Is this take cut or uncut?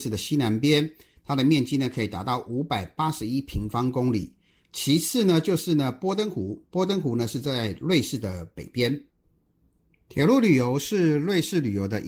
uncut